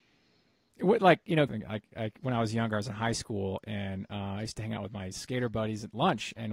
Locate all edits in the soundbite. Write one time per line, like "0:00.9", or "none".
0:01.5